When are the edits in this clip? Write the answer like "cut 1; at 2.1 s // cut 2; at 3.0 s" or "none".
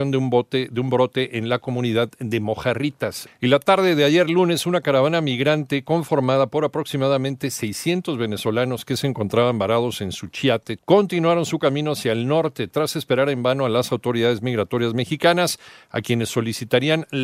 cut 1; at 3.3 s // cut 2; at 10.8 s